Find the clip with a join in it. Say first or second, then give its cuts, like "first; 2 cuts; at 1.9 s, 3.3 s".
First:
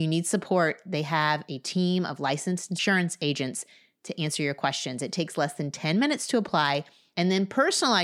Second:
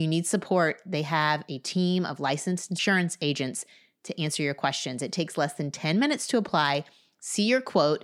first; 1 cut; at 7.1 s